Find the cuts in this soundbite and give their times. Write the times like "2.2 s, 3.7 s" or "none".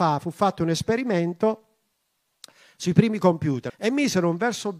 3.7 s

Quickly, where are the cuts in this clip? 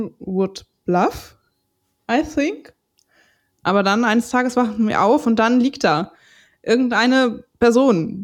3.6 s

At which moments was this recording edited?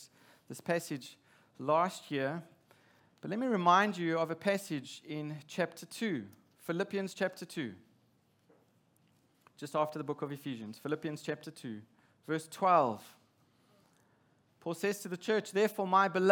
none

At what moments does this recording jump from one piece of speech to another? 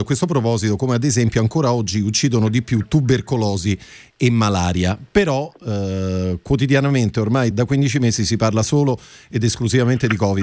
7.5 s

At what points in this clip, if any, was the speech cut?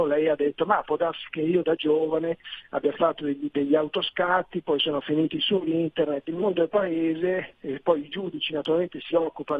6.3 s

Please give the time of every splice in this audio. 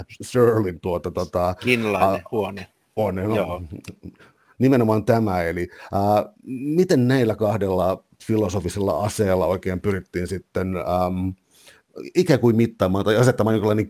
3.0 s

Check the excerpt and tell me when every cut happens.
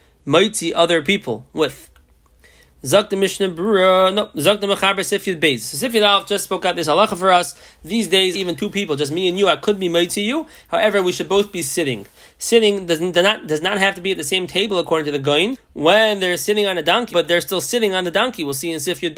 8.3 s, 15.5 s, 17.1 s

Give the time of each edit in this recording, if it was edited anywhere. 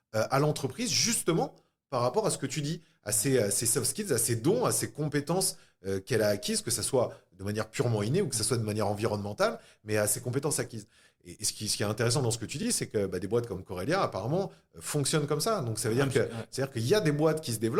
none

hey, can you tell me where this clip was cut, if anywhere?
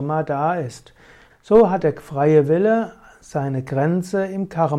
1.3 s

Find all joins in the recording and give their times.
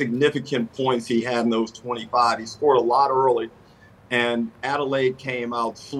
none

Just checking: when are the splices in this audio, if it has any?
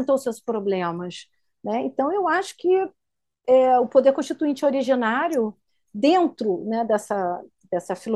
none

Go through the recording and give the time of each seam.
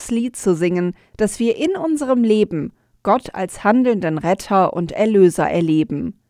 1.1 s

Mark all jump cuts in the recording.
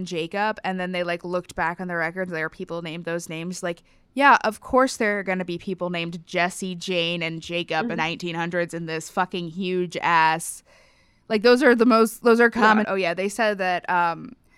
8.0 s, 12.8 s

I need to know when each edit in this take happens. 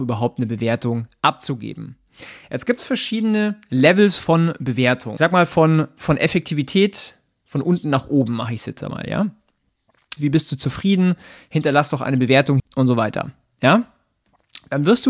10.2 s, 12.6 s

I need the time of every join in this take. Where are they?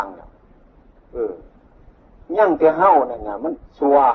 none

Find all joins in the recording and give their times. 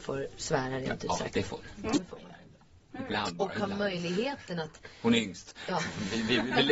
none

